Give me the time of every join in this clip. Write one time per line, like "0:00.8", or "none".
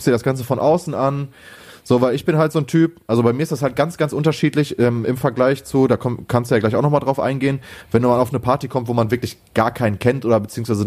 none